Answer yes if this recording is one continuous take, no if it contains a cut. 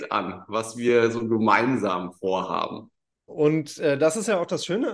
no